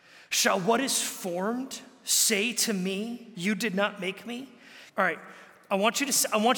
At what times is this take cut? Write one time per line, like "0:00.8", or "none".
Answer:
0:03.3
0:04.9